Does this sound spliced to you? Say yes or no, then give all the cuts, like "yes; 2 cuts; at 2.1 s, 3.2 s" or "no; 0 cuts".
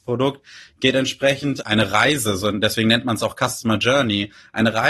no; 0 cuts